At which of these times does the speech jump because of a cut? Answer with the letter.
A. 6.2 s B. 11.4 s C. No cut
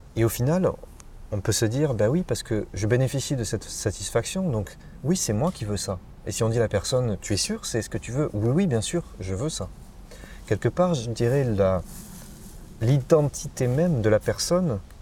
C